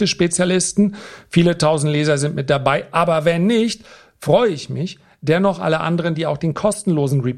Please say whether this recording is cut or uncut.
uncut